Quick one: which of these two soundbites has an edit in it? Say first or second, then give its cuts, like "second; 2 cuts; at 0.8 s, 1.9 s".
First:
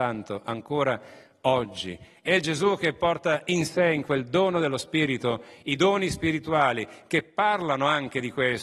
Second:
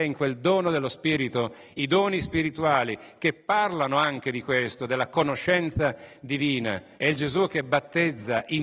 second; 1 cut; at 7.0 s